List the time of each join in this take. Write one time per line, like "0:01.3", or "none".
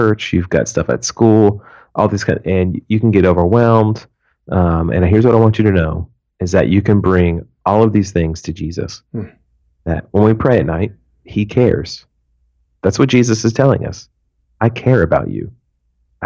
none

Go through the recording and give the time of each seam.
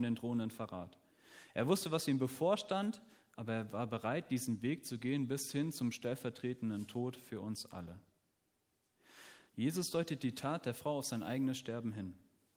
0:09.5

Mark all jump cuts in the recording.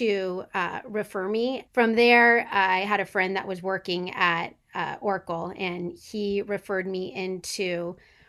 0:01.7

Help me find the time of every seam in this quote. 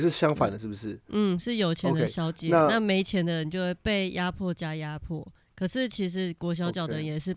0:03.8

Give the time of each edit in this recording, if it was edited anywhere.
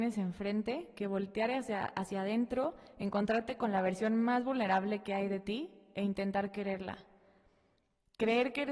none

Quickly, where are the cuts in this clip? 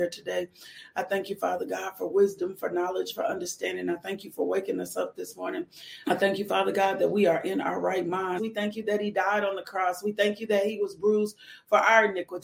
0:06.0
0:08.4

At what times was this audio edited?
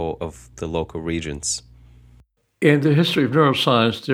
none

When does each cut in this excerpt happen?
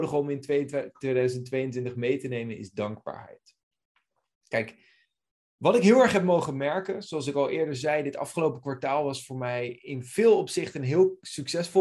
none

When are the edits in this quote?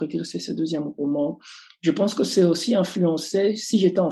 none

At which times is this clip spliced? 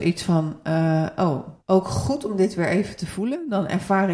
0:01.6

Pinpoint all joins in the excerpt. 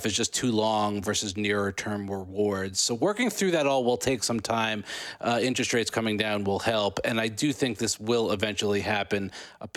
none

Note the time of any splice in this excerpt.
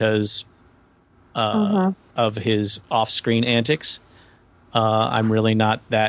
none

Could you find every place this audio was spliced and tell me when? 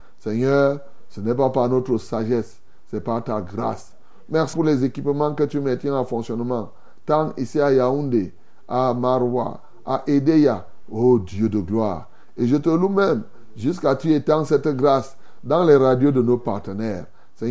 0:04.5

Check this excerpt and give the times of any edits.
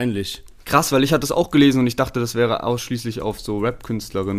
none

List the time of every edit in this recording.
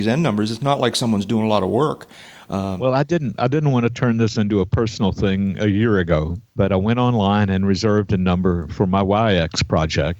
0:06.5

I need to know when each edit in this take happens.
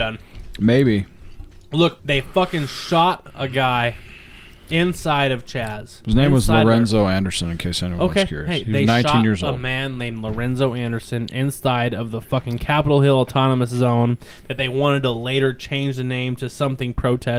0:02.0

